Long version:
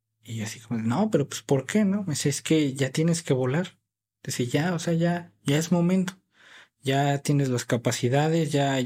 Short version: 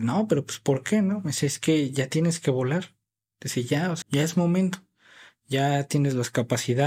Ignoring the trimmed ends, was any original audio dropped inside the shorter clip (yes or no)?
yes